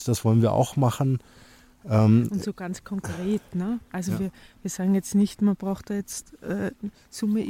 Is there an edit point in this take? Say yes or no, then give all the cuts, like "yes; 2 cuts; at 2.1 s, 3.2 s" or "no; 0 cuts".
no; 0 cuts